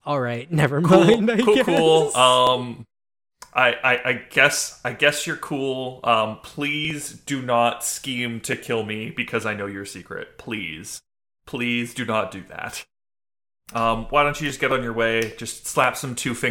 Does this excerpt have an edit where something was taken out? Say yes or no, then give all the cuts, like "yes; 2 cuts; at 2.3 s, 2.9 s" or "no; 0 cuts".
yes; 1 cut; at 13.7 s